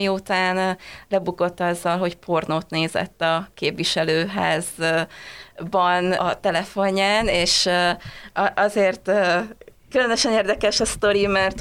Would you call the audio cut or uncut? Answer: uncut